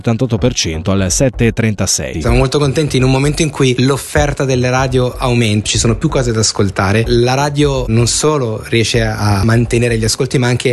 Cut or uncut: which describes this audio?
cut